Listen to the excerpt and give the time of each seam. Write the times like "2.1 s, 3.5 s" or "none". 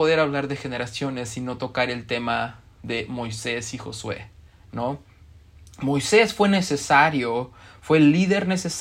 none